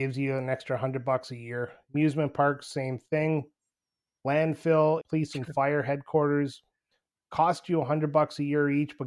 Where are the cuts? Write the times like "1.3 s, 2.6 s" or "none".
5.0 s